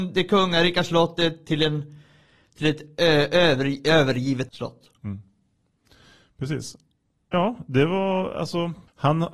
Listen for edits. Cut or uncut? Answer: uncut